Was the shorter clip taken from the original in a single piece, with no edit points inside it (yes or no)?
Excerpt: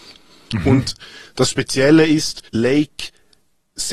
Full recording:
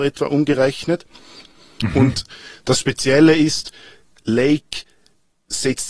no